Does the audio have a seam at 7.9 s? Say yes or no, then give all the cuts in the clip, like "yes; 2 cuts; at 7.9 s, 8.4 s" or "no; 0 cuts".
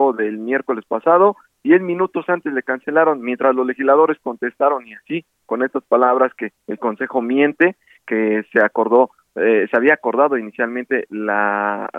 no; 0 cuts